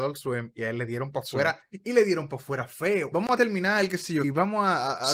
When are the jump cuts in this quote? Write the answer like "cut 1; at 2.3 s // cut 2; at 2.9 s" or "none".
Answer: cut 1; at 3.1 s // cut 2; at 4.2 s